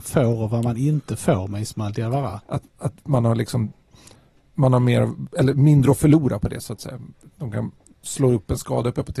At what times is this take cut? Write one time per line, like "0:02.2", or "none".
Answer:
0:02.4